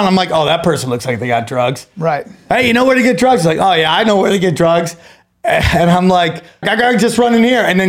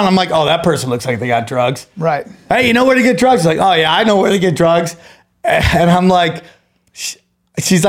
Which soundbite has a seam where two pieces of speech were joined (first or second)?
first